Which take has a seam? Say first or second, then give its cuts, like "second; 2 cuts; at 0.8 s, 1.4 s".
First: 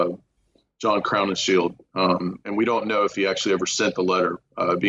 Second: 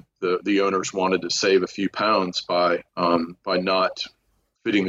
second; 1 cut; at 2.9 s